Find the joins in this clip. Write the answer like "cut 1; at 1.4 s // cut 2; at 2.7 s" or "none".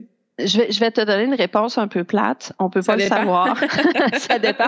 none